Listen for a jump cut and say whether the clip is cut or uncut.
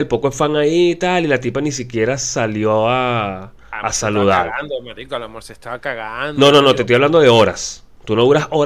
uncut